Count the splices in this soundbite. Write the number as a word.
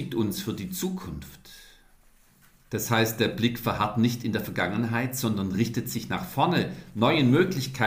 zero